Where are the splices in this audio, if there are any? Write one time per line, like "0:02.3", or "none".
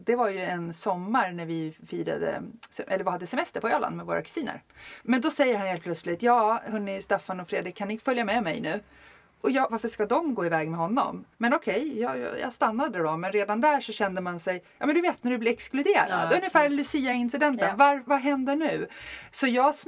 0:05.0
0:09.7
0:11.3